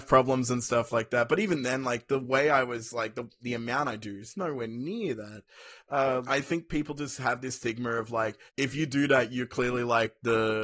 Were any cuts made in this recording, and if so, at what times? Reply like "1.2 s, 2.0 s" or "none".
6.3 s, 8.5 s